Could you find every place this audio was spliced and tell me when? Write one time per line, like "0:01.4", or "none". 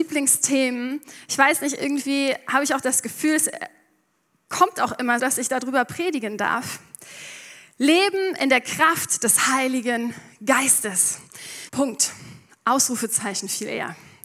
0:05.2
0:11.7